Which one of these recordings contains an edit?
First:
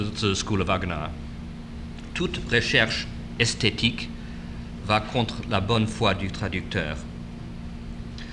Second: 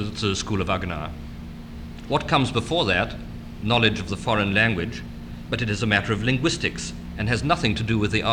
second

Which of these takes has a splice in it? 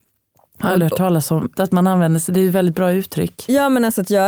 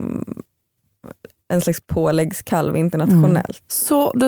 first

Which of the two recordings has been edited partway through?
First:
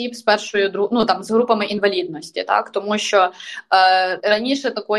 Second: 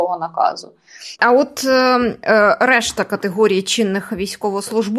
second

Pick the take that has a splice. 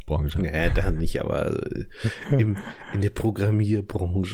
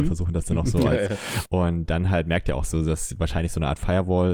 second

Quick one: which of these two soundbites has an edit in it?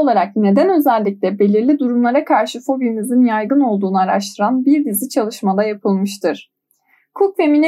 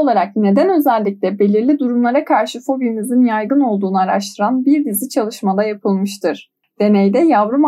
second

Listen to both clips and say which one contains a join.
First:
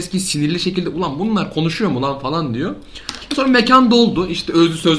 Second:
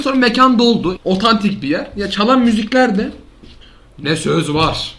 second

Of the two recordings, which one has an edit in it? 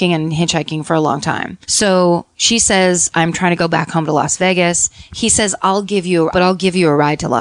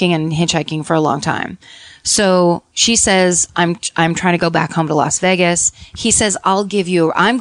first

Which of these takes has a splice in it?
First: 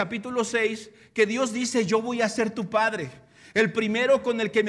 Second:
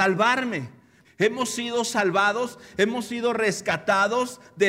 second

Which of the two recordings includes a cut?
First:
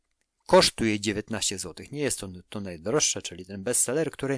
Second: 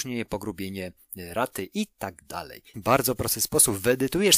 second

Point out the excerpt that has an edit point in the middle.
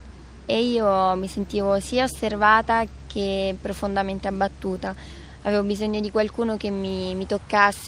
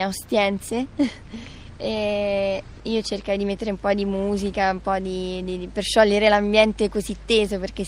second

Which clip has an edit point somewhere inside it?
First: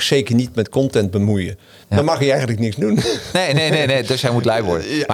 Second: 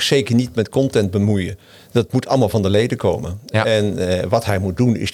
first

